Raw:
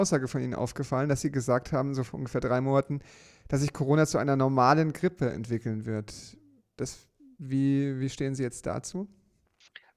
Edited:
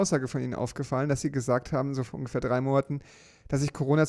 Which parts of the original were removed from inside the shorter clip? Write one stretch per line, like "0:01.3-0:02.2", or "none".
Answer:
none